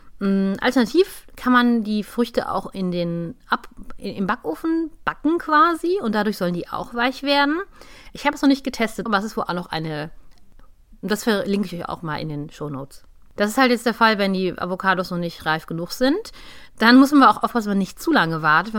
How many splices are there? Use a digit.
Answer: 1